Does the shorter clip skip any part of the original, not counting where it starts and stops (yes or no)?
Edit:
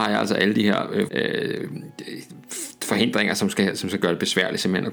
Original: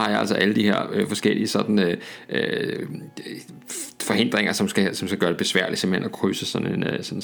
yes